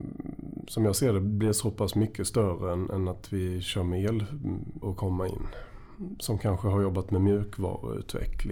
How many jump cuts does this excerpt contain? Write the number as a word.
one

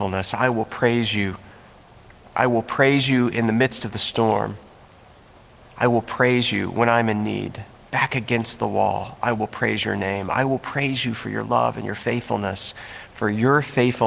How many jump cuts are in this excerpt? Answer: one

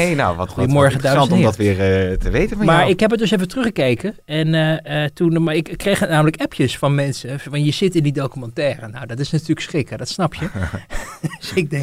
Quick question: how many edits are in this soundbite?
zero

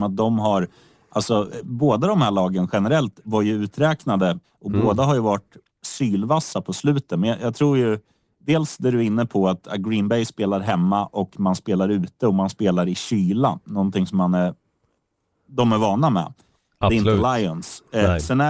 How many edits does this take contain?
one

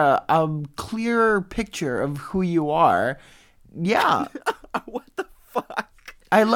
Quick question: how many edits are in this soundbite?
one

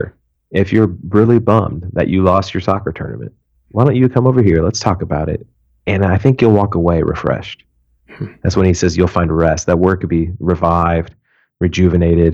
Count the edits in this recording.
zero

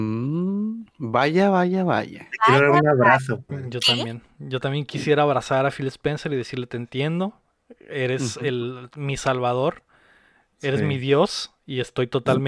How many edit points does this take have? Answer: one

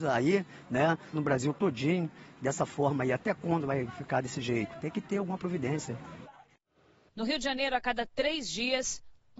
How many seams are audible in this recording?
two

